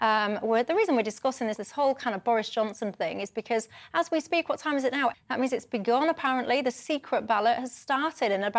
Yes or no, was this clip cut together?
yes